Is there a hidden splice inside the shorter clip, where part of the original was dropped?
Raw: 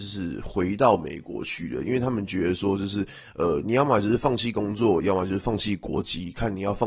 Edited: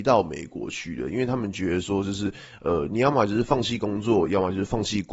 no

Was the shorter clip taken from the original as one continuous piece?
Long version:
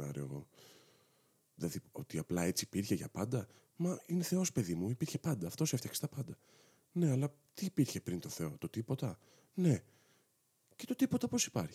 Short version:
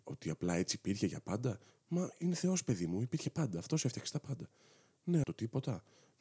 no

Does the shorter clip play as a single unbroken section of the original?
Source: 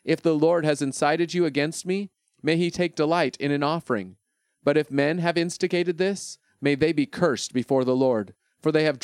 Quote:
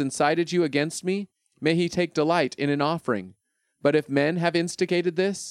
yes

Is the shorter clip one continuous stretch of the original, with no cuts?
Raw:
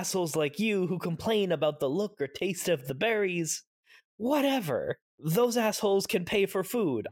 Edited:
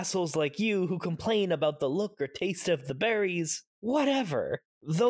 no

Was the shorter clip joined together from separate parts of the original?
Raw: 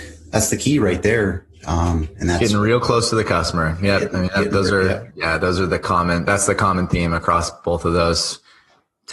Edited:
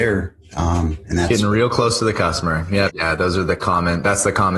yes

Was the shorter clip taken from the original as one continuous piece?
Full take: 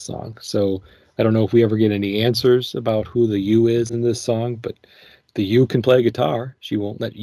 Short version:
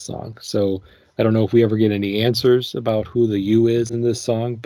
yes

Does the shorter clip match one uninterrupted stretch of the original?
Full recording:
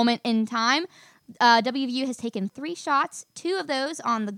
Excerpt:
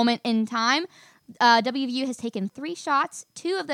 yes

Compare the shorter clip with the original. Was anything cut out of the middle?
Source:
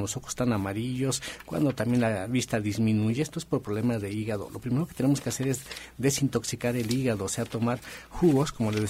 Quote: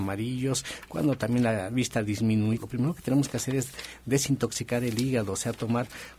yes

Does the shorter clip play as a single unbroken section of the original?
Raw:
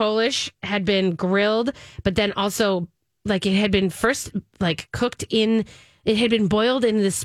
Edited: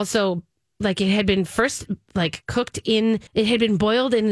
no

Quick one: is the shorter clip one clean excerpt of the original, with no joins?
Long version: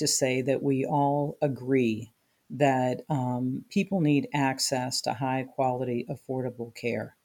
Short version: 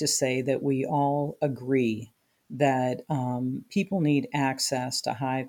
yes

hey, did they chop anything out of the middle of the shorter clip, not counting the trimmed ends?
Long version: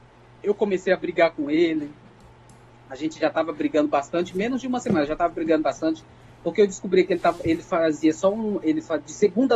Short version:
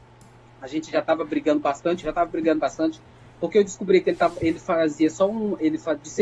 yes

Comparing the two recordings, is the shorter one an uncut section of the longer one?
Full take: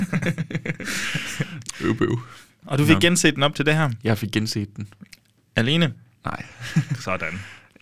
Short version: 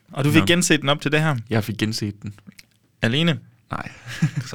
yes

